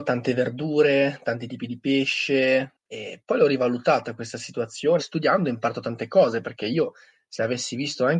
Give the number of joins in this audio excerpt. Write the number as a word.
one